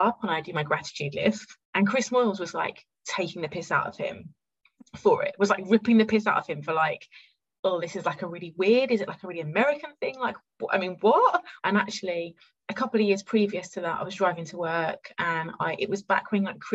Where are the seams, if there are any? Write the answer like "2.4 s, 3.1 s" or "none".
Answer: 1.6 s, 11.6 s